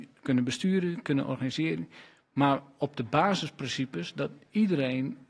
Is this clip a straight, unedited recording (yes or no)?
yes